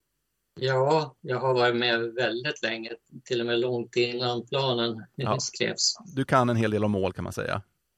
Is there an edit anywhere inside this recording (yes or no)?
no